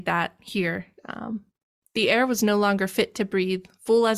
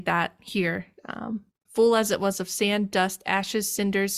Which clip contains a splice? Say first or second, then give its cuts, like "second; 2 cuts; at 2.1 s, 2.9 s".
second; 1 cut; at 1.7 s